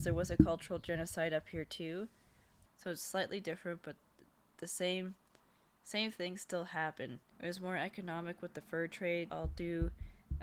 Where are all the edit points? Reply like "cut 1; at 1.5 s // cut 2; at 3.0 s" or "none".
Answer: cut 1; at 2.7 s // cut 2; at 7.3 s // cut 3; at 9.3 s